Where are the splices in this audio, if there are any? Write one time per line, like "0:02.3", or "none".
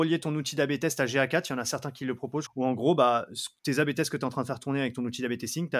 0:02.5